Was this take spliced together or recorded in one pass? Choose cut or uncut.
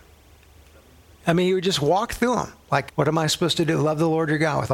cut